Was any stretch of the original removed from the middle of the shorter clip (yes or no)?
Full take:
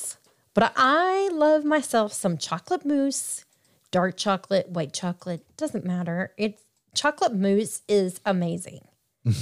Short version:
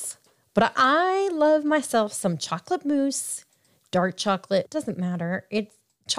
yes